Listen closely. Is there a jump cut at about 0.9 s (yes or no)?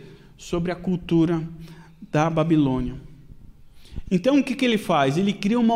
no